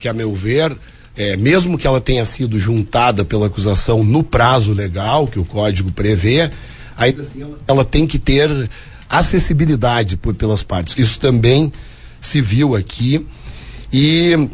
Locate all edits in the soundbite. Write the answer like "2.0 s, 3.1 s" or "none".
11.0 s